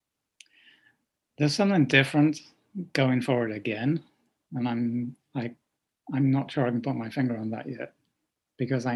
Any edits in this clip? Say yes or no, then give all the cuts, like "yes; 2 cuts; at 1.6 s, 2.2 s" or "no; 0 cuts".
no; 0 cuts